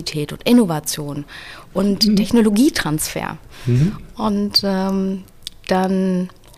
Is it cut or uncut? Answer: uncut